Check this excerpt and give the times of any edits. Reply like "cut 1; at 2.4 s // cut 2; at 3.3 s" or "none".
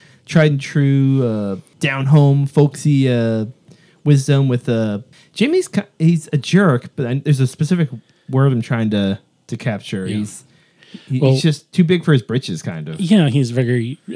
none

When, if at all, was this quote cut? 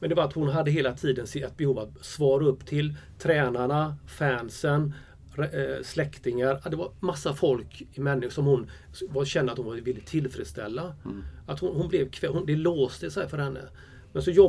none

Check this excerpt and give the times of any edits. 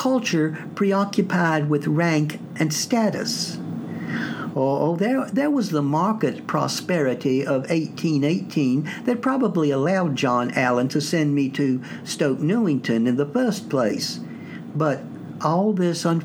none

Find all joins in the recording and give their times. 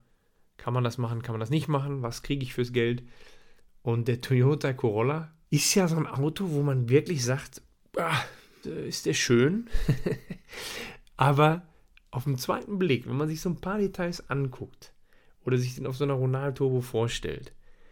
cut 1; at 5.4 s // cut 2; at 8.6 s

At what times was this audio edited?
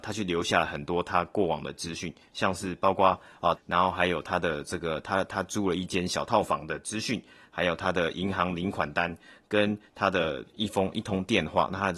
cut 1; at 3.6 s

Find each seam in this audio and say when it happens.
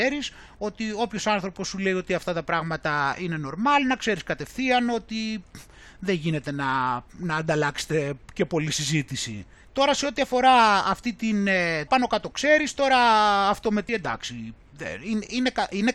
cut 1; at 9.6 s // cut 2; at 11.9 s // cut 3; at 13.9 s

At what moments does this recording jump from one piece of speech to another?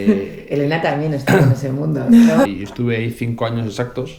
cut 1; at 2.4 s

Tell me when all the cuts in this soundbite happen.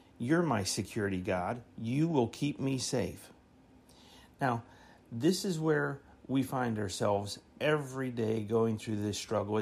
cut 1; at 1.7 s

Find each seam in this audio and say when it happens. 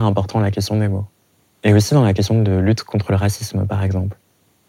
none

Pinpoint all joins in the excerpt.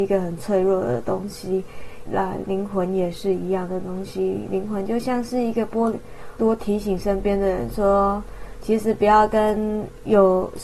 cut 1; at 2.1 s // cut 2; at 6.4 s

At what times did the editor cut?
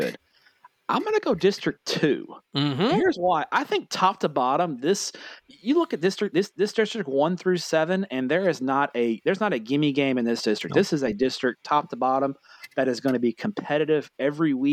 none

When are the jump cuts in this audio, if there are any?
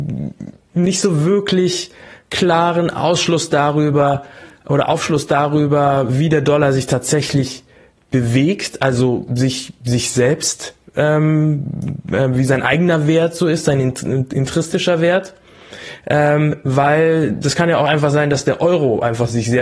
none

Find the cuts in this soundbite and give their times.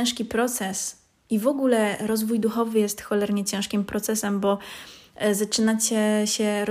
none

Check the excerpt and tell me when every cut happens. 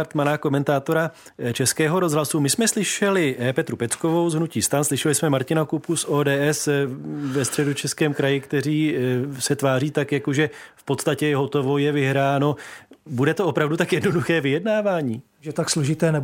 cut 1; at 15.3 s

